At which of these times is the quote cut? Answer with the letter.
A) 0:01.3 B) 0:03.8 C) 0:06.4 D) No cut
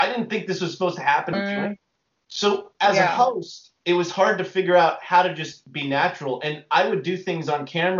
A